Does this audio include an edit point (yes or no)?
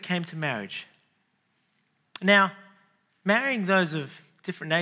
no